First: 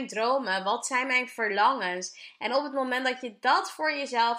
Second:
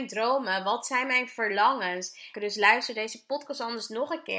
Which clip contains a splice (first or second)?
second